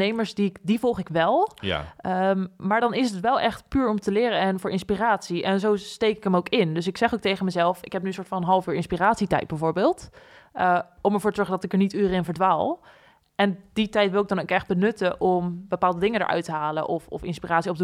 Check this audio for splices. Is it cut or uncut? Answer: uncut